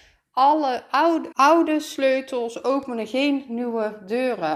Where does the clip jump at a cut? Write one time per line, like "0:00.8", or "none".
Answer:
0:01.3